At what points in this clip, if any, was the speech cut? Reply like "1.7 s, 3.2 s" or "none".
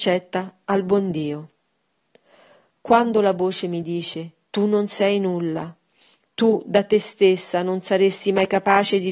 none